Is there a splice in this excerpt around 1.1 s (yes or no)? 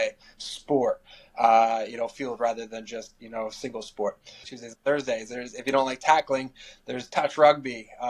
no